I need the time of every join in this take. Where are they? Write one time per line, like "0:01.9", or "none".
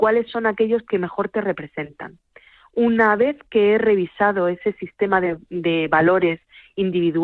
none